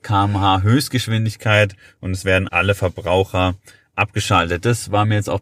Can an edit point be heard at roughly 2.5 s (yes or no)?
yes